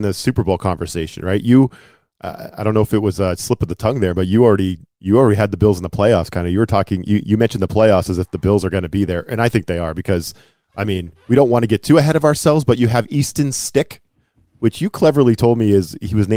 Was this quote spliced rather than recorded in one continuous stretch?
no; 0 cuts

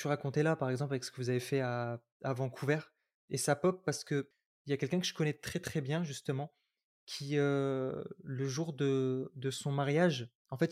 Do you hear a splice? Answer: no; 0 cuts

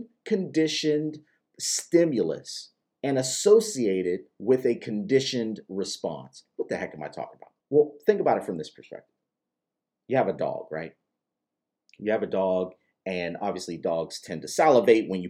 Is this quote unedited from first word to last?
no; 1 cut; at 7.6 s

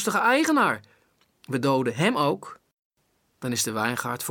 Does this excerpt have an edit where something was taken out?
no; 0 cuts

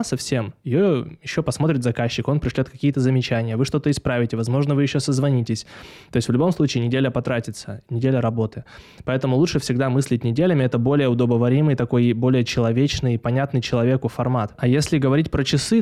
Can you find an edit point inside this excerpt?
no; 0 cuts

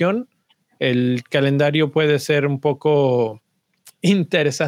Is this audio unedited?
yes; 0 cuts

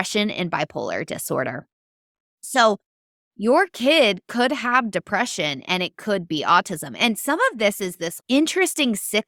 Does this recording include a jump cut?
no; 0 cuts

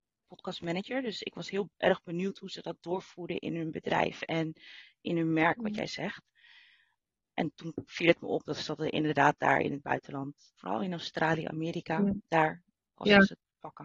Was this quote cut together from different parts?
no; 0 cuts

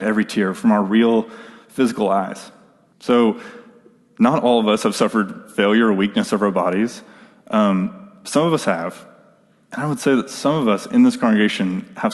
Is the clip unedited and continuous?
no; 1 cut; at 2.9 s

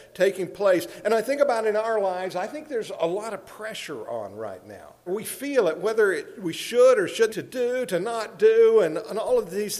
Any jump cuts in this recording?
yes; 2 cuts; at 5.1 s, 7.3 s

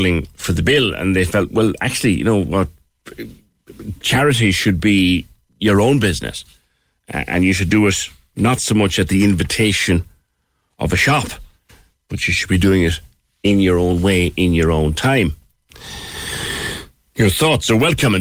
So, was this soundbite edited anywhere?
no; 0 cuts

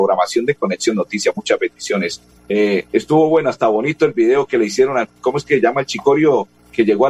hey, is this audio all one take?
no; 1 cut; at 2.4 s

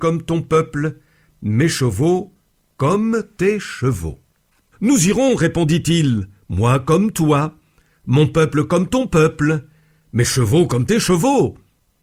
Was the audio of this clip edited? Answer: yes; 1 cut; at 4.7 s

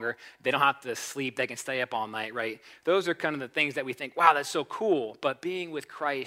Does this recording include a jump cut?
no; 0 cuts

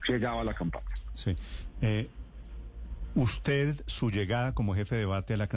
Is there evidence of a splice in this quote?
no; 0 cuts

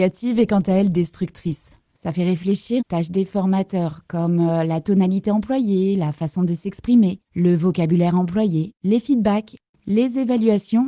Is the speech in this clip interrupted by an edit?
yes; 2 cuts; at 2.8 s, 7.2 s

